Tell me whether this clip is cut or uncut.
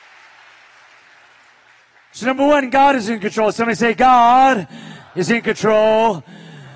uncut